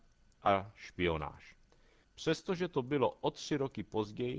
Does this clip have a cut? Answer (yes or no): yes